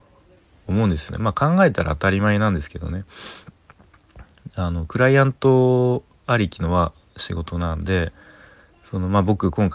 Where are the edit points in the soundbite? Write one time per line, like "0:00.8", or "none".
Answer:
none